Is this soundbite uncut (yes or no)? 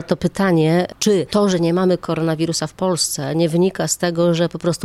yes